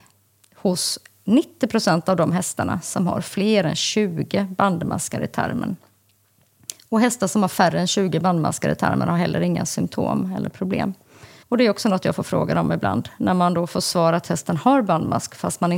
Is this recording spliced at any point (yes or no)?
yes